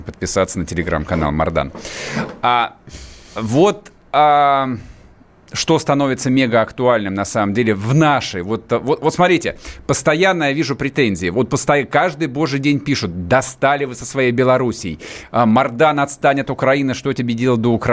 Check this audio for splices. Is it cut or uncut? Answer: uncut